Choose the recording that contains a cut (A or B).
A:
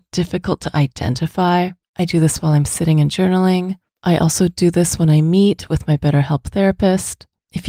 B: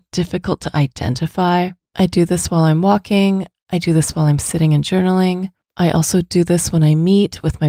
A